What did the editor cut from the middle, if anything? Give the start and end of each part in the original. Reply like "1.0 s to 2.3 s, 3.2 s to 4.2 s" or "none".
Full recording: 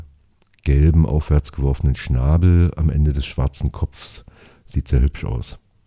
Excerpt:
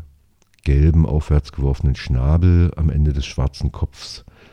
none